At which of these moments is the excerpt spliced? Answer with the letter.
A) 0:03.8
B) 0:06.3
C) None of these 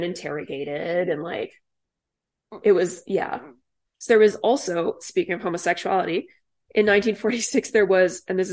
A